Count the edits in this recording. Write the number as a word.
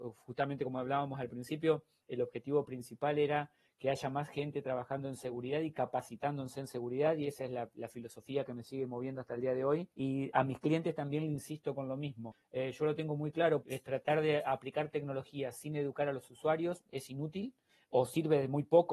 two